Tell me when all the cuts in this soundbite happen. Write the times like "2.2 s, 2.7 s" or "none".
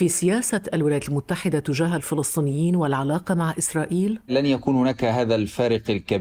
none